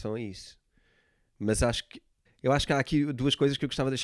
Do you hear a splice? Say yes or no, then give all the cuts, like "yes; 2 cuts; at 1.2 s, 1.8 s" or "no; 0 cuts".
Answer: yes; 1 cut; at 2.3 s